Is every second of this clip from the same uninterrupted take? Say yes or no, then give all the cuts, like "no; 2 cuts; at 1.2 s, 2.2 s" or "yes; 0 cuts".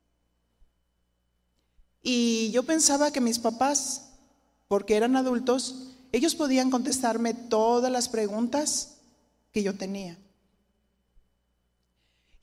yes; 0 cuts